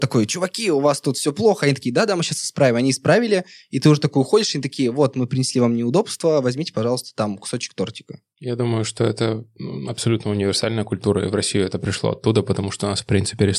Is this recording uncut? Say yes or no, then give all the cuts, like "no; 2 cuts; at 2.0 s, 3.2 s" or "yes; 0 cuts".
yes; 0 cuts